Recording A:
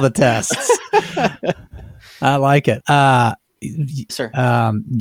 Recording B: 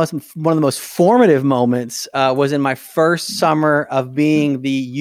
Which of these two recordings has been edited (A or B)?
A